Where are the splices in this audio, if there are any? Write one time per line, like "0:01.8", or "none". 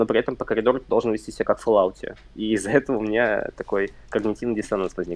none